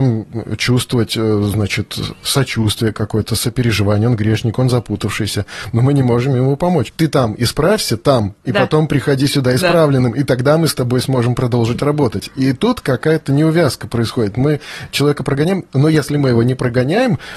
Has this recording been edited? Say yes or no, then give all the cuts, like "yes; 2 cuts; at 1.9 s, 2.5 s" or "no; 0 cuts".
yes; 1 cut; at 6.9 s